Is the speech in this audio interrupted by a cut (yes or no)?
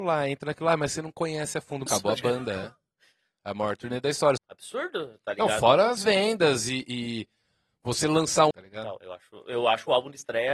yes